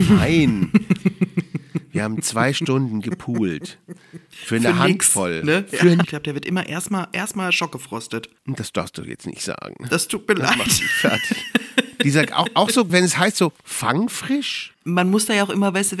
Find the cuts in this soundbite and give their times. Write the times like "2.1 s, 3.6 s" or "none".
6.0 s, 12.9 s

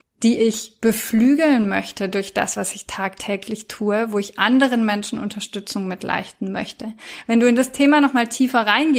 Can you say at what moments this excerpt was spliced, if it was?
none

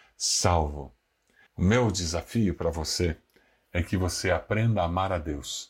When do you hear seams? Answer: 1.5 s

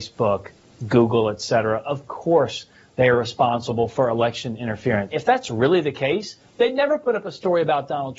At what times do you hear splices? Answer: 5.1 s

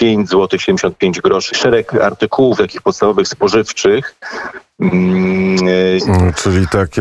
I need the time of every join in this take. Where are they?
1.5 s, 6.0 s

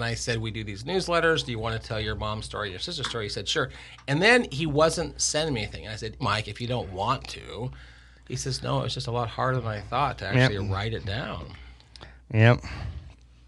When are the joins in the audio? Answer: 6.2 s

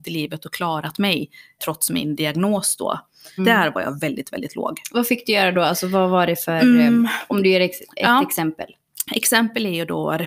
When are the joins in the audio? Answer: 1.6 s, 3.4 s

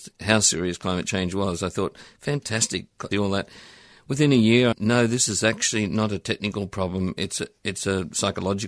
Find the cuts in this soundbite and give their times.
3.1 s, 4.7 s

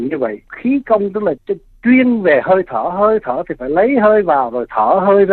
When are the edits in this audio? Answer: 1.4 s

